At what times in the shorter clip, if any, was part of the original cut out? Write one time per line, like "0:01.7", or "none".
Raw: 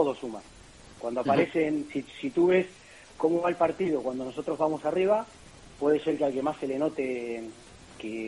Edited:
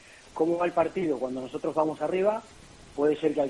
none